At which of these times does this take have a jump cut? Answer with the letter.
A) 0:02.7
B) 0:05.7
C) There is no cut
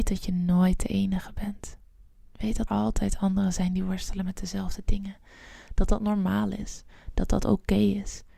A